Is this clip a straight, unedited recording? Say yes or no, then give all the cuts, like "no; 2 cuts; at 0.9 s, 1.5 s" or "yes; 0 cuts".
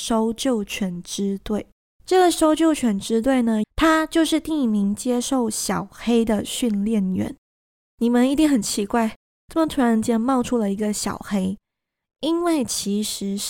no; 1 cut; at 3.6 s